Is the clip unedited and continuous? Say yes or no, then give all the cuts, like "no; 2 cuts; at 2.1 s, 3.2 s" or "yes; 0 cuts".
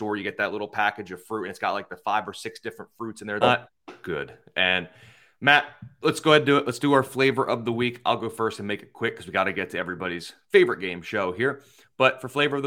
no; 1 cut; at 3.4 s